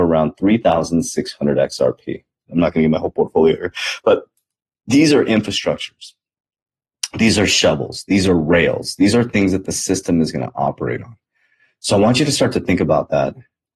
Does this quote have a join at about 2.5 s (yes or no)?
yes